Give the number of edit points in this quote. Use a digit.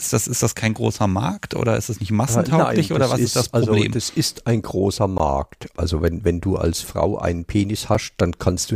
1